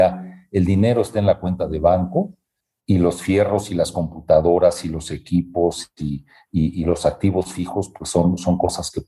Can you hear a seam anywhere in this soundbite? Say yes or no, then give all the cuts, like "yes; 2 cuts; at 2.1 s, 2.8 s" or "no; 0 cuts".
no; 0 cuts